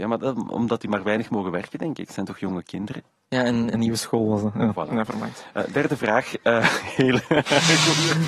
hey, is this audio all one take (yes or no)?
no